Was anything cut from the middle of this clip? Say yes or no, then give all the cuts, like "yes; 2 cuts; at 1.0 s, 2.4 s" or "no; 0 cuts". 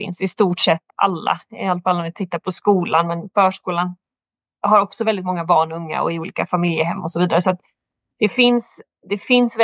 no; 0 cuts